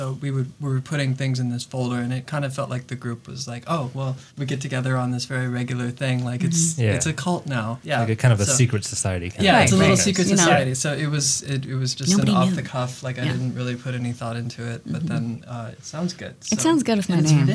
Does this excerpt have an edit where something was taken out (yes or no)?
yes